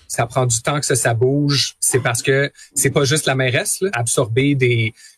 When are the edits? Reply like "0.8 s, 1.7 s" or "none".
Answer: 3.9 s